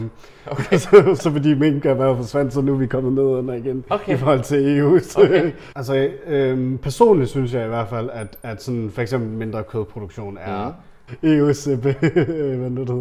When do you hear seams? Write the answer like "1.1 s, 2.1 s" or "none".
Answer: 5.7 s, 11.1 s